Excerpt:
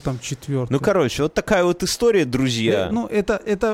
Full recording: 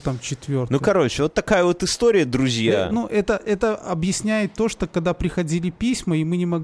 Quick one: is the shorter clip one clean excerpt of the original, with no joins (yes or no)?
yes